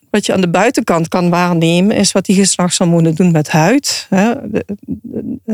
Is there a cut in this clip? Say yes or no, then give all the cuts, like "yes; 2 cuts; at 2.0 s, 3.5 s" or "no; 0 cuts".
no; 0 cuts